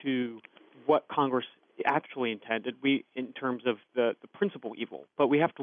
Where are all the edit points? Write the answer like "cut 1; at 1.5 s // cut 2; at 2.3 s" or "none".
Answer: none

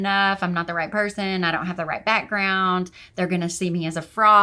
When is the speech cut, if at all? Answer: none

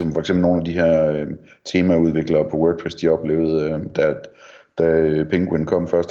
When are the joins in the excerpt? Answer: none

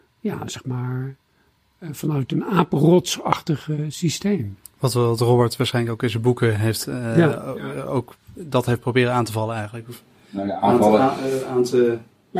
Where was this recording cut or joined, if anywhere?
none

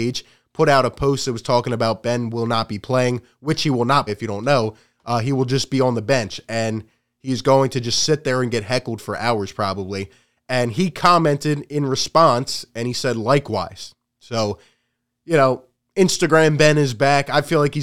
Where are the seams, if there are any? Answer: cut 1; at 4.1 s

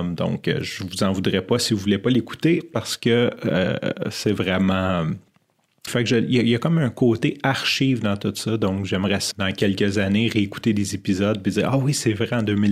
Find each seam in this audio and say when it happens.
cut 1; at 5.9 s // cut 2; at 9.3 s

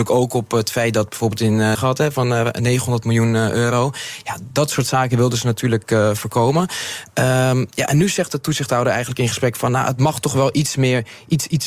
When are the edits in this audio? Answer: cut 1; at 1.8 s

